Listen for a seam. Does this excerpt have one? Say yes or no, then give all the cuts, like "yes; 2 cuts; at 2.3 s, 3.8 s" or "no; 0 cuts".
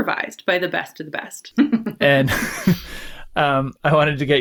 yes; 1 cut; at 1.5 s